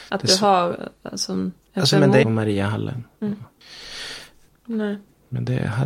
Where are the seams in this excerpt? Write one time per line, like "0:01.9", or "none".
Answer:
0:02.2
0:04.6